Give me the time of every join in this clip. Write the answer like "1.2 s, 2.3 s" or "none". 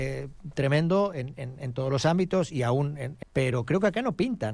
3.2 s